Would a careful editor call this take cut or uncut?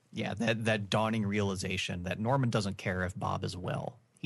uncut